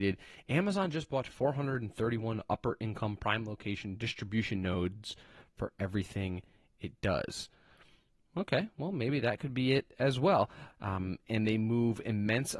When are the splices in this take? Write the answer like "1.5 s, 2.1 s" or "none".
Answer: 10.7 s